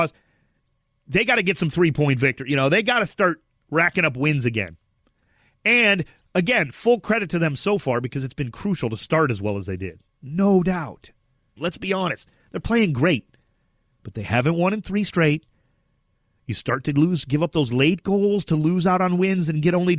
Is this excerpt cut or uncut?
cut